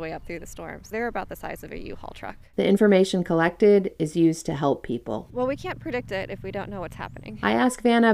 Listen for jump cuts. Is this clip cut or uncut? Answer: cut